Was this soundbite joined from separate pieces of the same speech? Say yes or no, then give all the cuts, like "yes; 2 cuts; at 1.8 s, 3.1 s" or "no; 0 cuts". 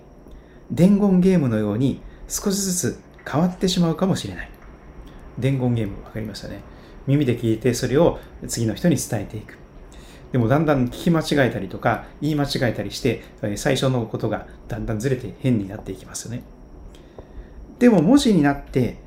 yes; 2 cuts; at 7.0 s, 17.8 s